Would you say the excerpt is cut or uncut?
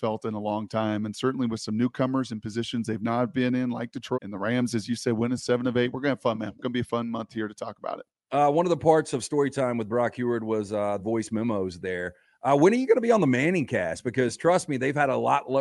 cut